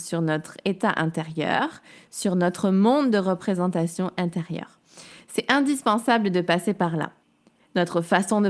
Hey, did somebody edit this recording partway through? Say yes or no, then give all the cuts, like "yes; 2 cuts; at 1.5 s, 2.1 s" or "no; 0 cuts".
no; 0 cuts